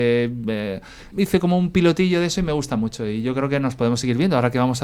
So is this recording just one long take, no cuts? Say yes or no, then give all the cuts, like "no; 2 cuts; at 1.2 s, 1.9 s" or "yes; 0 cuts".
no; 1 cut; at 1.1 s